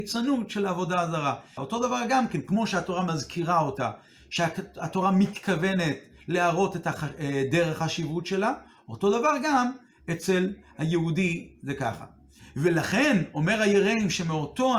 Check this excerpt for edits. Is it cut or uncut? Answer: cut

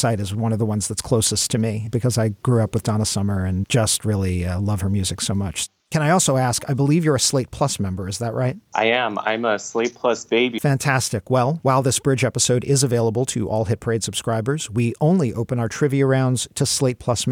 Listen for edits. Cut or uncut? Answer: cut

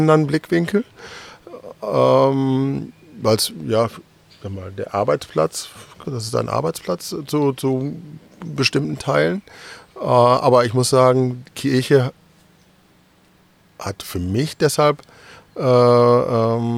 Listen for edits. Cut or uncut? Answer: cut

